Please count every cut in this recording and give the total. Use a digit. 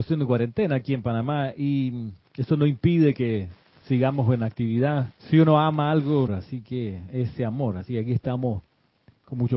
2